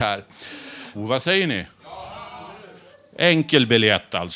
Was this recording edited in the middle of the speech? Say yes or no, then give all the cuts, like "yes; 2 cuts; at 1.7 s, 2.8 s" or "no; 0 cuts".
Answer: yes; 1 cut; at 0.9 s